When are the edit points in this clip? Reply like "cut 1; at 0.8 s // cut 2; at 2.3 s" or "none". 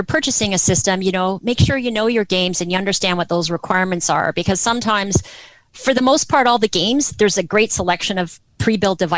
none